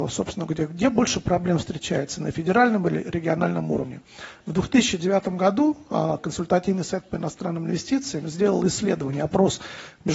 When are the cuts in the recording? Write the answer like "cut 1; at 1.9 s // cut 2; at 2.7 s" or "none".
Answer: cut 1; at 4.4 s